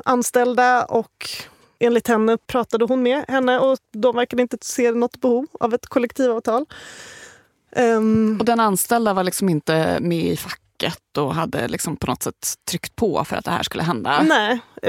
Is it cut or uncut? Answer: uncut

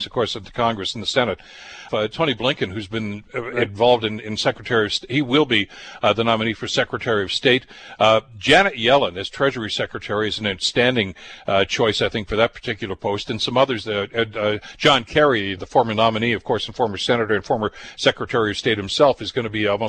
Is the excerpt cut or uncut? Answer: cut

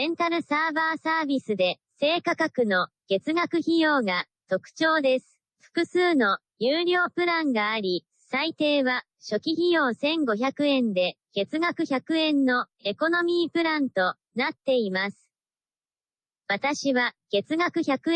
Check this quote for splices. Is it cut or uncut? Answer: cut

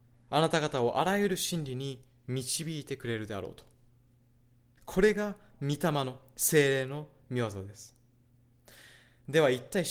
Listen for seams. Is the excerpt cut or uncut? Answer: cut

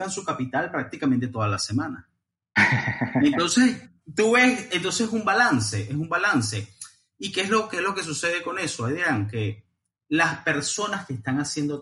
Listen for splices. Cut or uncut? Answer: uncut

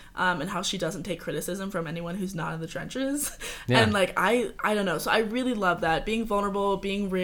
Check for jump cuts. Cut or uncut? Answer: uncut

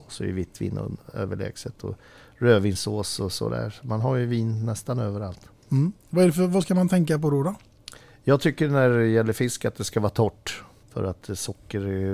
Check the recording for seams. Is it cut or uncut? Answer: cut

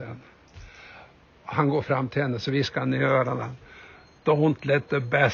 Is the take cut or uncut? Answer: uncut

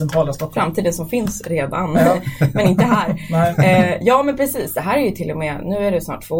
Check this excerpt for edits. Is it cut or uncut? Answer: uncut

